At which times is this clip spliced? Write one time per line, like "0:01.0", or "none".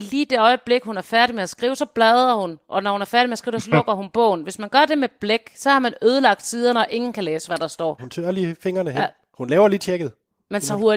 0:08.0
0:09.3